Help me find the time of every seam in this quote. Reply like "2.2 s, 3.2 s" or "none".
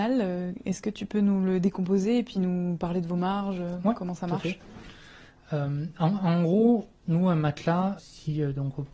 7.0 s, 8.0 s